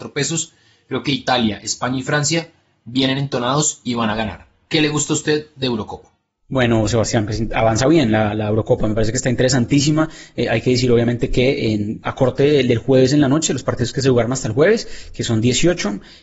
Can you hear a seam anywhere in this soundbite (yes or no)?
no